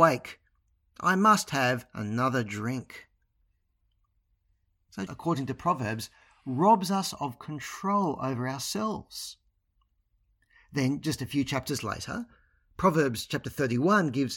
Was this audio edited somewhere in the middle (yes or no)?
yes